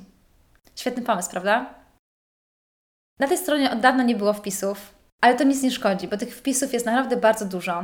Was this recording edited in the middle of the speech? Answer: yes; 1 cut; at 5.1 s

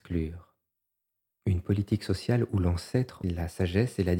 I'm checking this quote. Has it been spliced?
yes; 2 cuts; at 1.3 s, 3.2 s

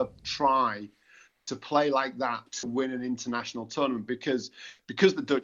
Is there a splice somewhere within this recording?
no; 0 cuts

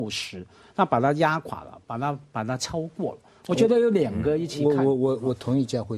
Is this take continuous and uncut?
yes; 0 cuts

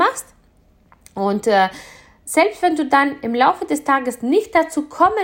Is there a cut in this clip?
no; 0 cuts

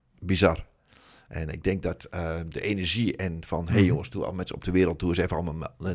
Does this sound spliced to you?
no; 0 cuts

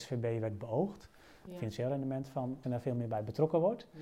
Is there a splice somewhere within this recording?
yes; 2 cuts; at 1.5 s, 2.6 s

